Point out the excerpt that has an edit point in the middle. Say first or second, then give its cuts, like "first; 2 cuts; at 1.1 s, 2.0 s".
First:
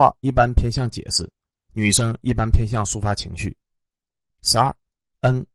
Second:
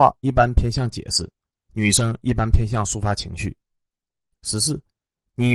first; 1 cut; at 4.3 s